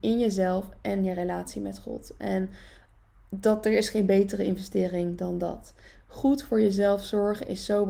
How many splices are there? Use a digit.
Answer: 0